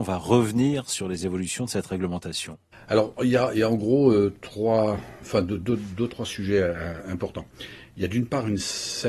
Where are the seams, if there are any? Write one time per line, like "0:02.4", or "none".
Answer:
none